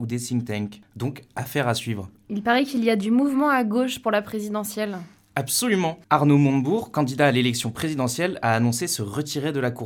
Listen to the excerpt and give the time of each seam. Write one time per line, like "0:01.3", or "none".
0:06.0